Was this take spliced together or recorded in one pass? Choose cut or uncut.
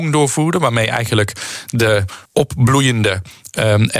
cut